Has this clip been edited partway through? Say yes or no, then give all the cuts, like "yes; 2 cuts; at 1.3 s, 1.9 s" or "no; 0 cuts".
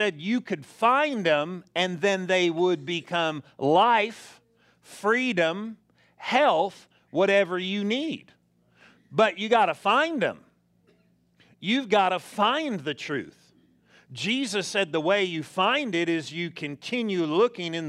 no; 0 cuts